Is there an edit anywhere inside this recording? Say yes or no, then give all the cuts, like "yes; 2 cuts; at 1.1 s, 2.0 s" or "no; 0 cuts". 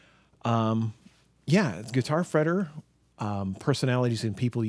yes; 1 cut; at 3.1 s